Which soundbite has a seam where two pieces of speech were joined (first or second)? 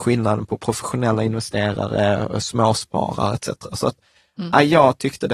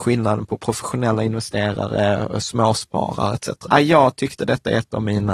second